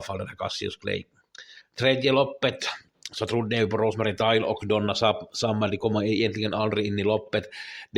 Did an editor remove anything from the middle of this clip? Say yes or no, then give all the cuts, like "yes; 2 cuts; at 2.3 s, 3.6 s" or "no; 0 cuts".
no; 0 cuts